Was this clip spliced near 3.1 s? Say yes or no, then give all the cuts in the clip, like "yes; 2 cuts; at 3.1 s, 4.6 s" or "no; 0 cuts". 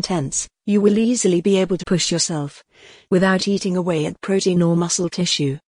no; 1 cut; at 1.8 s